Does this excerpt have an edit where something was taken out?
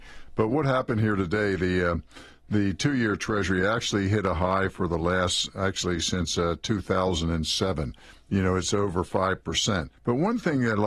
yes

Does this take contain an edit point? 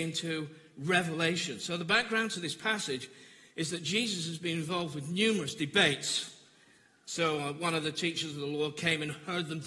no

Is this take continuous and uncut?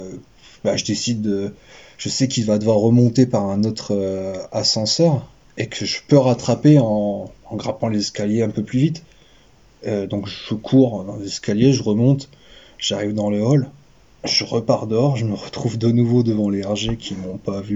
yes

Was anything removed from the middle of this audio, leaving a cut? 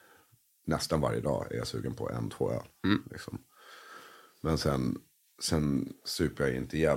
no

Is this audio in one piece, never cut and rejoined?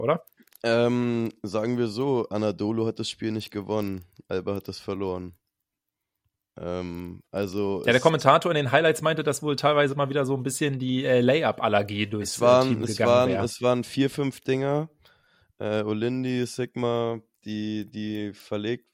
yes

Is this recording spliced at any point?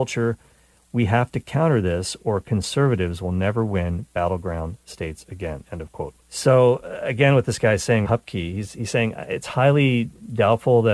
yes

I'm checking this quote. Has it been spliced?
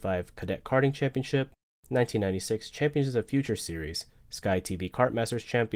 no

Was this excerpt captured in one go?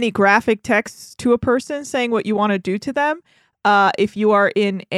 yes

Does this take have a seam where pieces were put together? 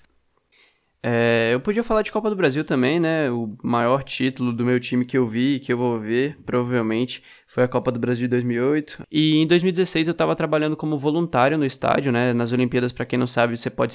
yes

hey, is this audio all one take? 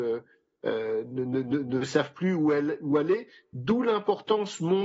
yes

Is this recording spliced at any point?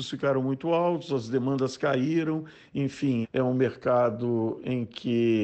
yes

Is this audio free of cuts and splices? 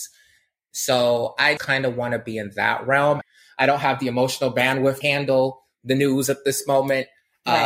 no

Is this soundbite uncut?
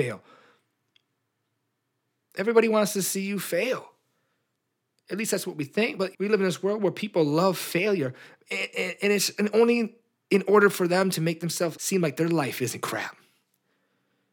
no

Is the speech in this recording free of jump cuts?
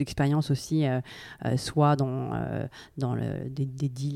yes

